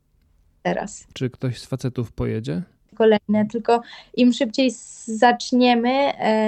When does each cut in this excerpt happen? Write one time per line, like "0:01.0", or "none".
0:01.1
0:02.9

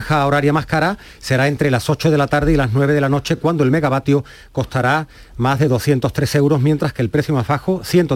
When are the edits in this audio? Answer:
none

